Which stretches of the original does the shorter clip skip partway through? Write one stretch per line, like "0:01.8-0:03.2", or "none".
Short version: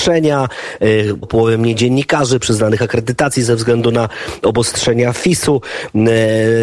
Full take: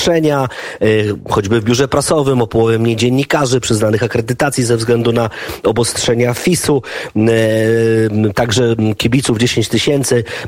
0:01.2-0:02.4

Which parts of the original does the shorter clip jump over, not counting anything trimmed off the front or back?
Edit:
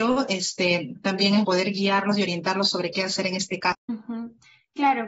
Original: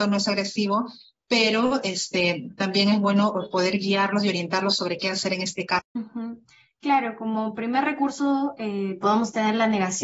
0:03.0-0:03.5

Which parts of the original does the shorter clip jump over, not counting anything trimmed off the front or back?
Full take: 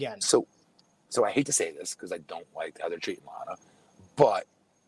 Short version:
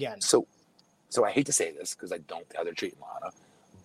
0:02.5-0:02.7

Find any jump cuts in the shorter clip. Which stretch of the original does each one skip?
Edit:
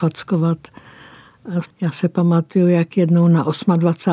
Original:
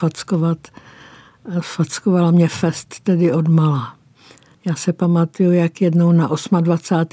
0:01.6-0:04.5

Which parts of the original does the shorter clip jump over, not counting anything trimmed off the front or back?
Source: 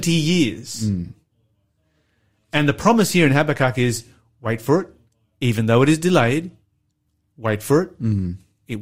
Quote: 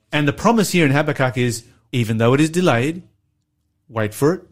0:04.3-0:05.4

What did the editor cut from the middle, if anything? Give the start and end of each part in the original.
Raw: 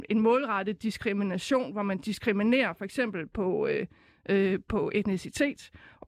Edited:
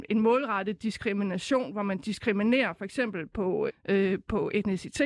0:03.7-0:04.1

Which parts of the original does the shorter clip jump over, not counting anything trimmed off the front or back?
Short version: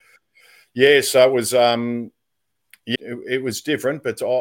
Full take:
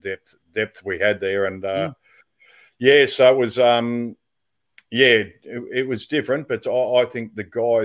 0:05.0-0:05.4

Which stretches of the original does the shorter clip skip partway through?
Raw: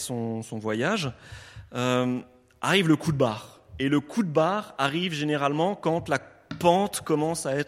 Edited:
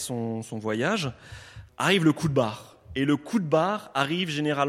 0:01.7-0:02.5

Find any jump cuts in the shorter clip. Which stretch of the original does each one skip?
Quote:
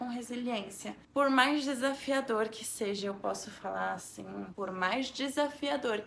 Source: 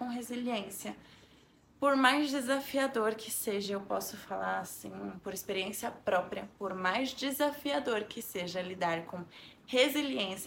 0:01.0-0:01.7
0:05.2-0:06.6

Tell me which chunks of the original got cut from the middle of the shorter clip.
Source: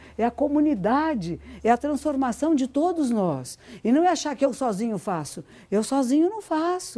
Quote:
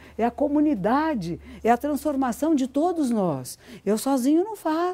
0:03.8-0:05.7

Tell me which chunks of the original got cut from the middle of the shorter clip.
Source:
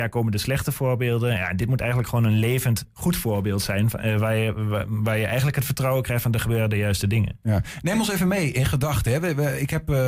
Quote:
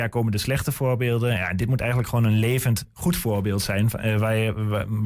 none

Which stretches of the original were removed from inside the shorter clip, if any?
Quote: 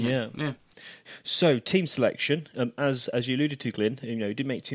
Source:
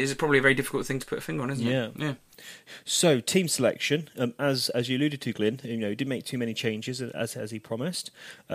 none

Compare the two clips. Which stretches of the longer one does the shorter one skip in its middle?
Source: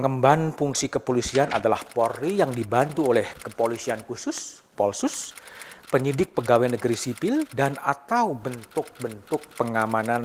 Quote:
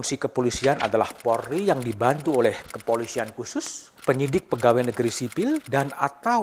0:04.7-0:05.8

